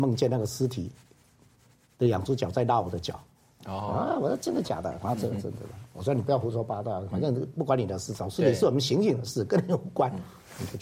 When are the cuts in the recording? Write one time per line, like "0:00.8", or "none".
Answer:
none

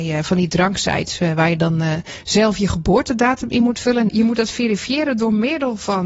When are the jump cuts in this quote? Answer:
0:04.1

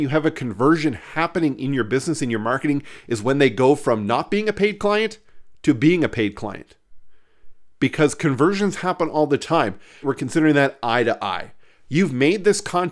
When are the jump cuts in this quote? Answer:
0:10.0

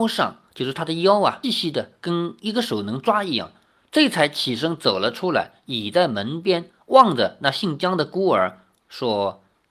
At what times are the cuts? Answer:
0:01.4

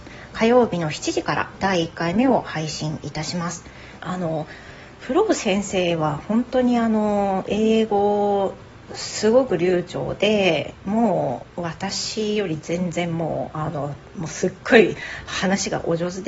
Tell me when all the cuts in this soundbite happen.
0:04.0

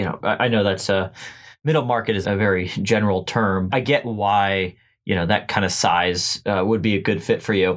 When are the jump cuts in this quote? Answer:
0:02.2
0:03.7

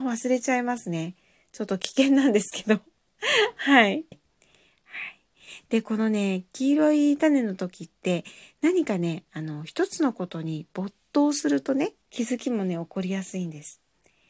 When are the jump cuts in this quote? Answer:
0:04.1
0:12.0

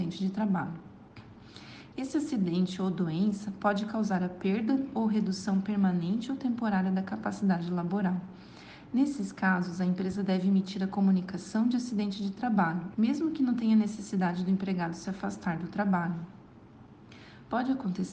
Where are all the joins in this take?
0:12.9

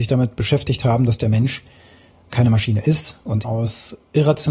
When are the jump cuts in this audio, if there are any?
0:03.4

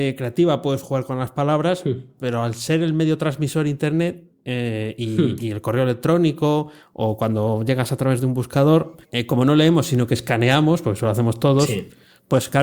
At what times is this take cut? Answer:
0:09.0

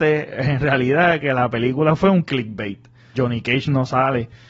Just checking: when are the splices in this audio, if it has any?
0:03.1

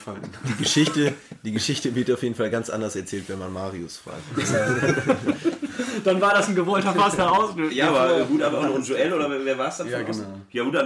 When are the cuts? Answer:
none

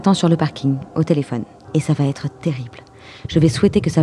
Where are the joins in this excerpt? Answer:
0:01.6

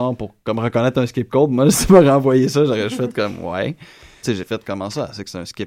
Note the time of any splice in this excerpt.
0:04.2

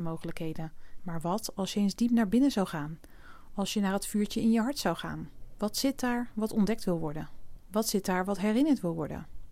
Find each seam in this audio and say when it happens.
0:01.0

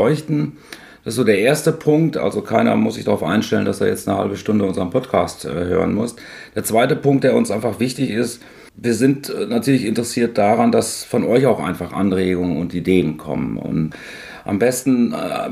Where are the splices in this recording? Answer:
none

